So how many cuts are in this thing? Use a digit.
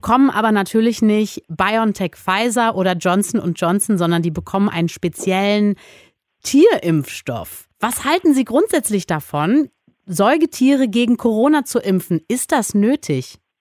1